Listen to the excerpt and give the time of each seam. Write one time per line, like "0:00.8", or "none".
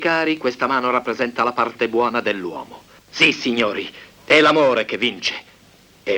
0:03.0
0:04.1